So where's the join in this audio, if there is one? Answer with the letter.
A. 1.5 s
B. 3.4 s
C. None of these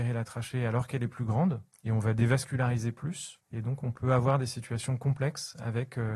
B